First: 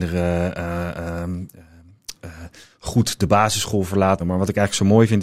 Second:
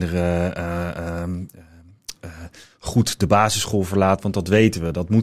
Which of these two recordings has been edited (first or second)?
first